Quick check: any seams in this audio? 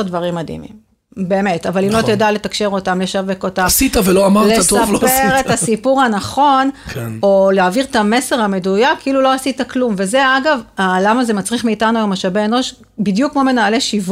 no; 0 cuts

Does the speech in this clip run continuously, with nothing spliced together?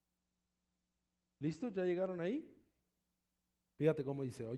yes; 0 cuts

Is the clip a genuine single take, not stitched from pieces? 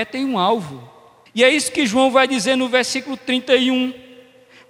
no; 1 cut; at 1.3 s

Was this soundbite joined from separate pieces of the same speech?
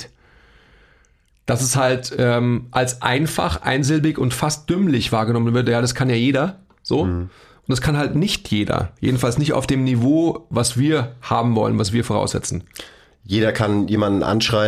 no; 0 cuts

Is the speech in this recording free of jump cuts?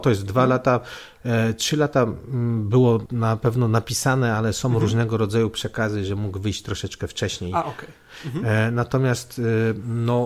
no; 1 cut; at 3.0 s

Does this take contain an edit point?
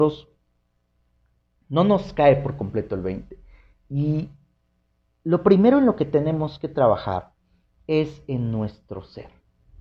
no; 0 cuts

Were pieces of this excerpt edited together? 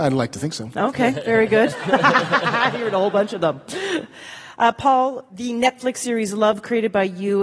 yes; 1 cut; at 1.7 s

